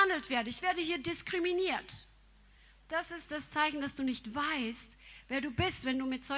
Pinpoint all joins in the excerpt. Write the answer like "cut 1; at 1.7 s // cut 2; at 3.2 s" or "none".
none